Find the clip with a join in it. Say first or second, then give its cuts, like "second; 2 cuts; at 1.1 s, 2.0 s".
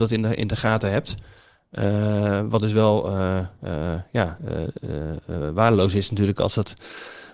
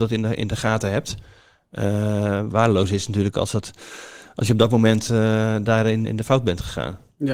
second; 2 cuts; at 2.5 s, 6.0 s